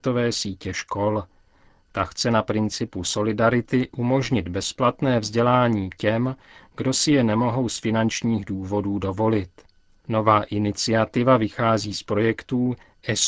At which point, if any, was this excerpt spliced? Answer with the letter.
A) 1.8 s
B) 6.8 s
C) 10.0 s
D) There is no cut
D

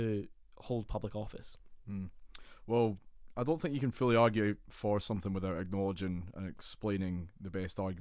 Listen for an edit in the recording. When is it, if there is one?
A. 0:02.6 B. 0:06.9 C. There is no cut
C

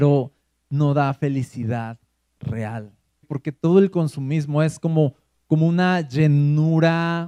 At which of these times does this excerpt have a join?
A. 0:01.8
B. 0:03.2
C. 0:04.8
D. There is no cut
B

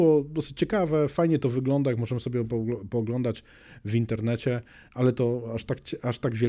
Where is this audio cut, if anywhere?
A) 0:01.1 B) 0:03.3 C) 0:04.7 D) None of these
D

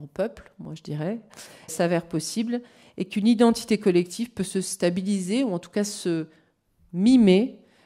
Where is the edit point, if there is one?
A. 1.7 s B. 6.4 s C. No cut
A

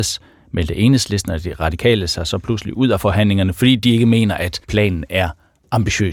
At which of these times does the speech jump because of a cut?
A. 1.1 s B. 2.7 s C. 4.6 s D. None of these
C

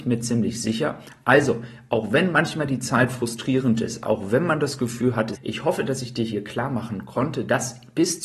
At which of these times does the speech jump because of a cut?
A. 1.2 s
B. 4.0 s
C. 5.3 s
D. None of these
C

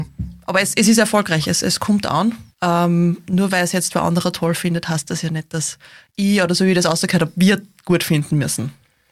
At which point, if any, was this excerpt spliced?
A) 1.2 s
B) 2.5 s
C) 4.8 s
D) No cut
B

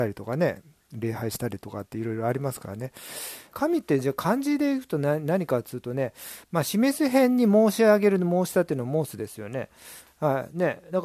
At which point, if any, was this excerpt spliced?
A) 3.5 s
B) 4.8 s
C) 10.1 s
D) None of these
A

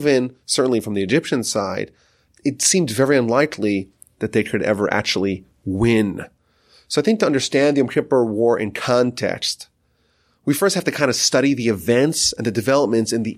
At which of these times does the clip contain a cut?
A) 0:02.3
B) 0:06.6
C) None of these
A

